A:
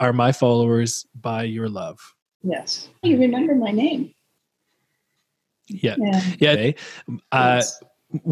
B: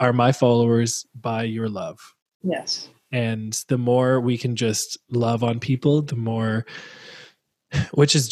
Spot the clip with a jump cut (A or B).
A